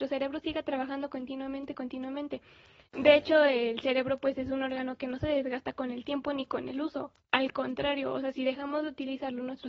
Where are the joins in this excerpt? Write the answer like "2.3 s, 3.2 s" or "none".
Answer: none